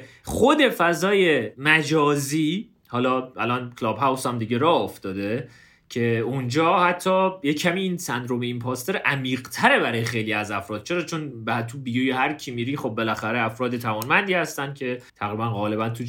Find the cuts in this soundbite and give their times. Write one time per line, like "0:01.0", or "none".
0:15.1